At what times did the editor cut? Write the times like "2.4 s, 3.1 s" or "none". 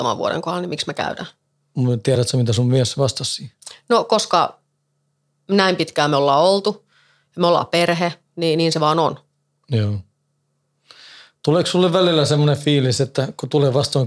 none